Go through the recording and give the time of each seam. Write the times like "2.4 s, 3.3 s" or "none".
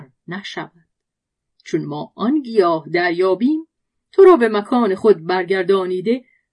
none